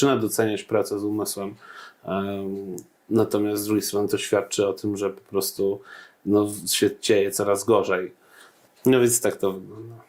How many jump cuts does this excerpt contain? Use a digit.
1